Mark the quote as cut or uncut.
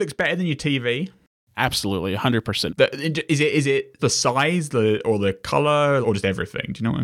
cut